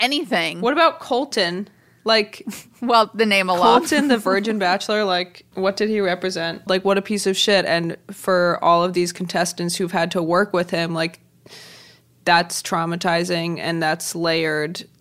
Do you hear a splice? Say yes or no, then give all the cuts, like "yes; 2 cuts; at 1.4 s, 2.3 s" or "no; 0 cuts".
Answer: yes; 1 cut; at 6.7 s